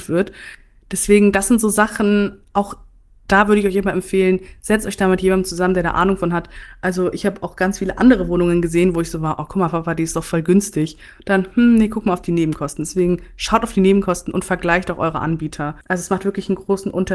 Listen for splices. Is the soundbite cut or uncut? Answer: cut